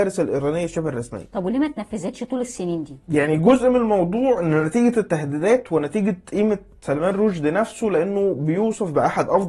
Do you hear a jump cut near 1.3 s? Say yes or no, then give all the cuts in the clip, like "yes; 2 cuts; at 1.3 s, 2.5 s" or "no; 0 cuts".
no; 0 cuts